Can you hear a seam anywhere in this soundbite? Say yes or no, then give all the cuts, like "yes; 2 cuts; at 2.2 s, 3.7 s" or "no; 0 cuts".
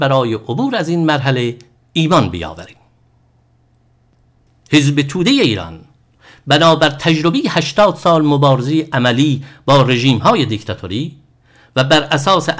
no; 0 cuts